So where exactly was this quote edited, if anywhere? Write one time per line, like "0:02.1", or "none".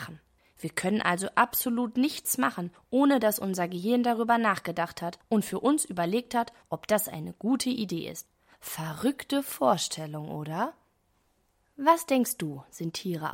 none